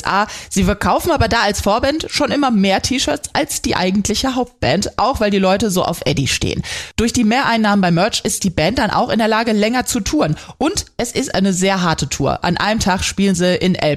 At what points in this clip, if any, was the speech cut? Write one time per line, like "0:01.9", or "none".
none